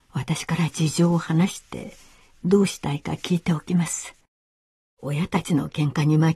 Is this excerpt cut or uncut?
cut